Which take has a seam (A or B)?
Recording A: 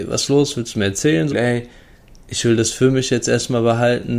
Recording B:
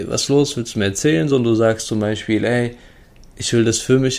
A